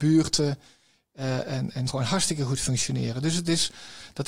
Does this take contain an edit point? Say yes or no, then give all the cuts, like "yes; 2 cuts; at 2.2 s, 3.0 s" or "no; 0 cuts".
yes; 1 cut; at 1.9 s